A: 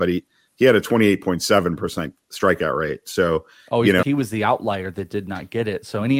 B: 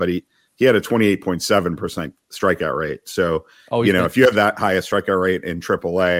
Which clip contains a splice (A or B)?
A